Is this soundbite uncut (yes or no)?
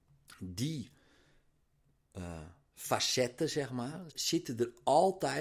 no